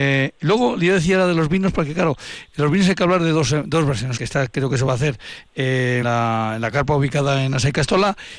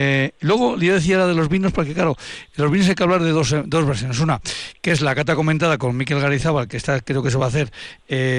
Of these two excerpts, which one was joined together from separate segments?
first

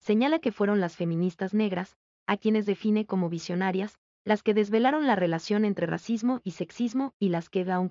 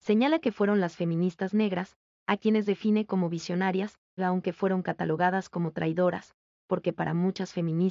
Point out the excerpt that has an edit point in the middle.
second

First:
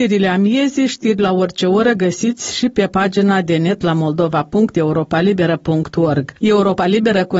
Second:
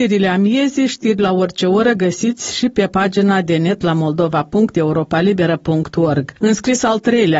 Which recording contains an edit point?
second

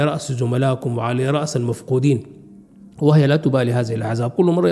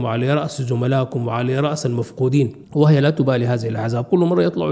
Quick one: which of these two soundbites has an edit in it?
second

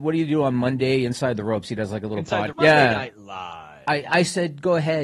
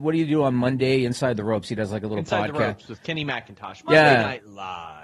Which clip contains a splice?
first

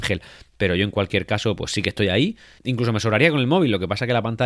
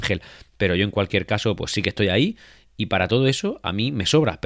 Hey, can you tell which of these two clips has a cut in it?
first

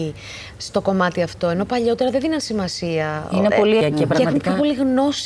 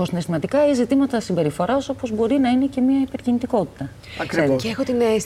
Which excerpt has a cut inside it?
first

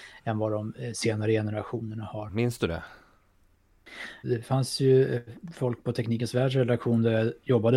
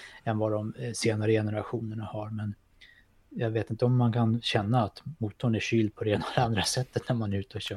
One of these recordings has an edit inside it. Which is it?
first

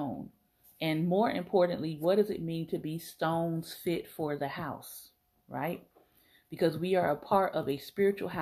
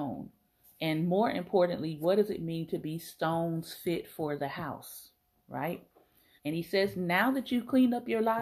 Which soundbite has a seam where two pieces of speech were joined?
second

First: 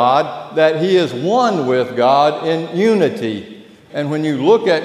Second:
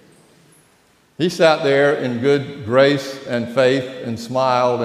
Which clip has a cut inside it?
first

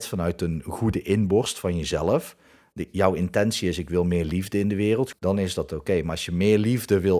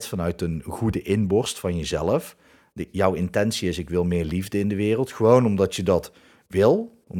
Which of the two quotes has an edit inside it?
first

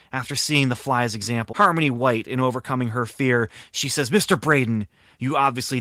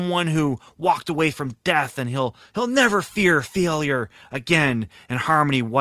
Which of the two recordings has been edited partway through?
first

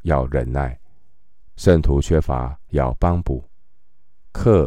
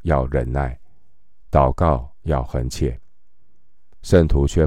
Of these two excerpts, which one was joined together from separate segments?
first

